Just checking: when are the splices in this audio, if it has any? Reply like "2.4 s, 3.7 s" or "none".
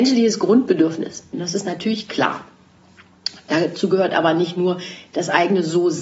1.3 s